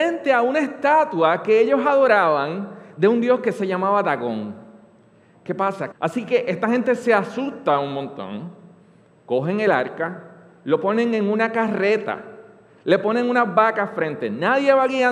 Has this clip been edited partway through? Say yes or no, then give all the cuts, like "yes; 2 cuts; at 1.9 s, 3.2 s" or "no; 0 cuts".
yes; 1 cut; at 5.9 s